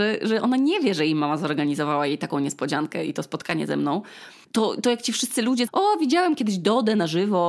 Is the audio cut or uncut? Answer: cut